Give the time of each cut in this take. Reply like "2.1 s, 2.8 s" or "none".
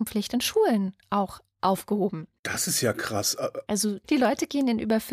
none

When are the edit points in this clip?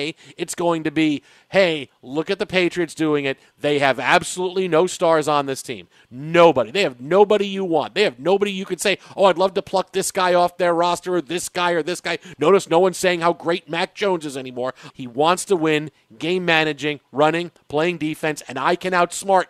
14.9 s

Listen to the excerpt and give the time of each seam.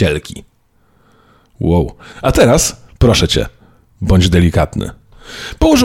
2.1 s

